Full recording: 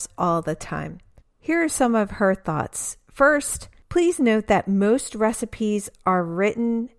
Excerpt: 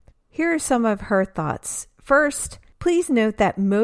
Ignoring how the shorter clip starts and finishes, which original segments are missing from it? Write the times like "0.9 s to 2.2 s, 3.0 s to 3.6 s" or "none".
none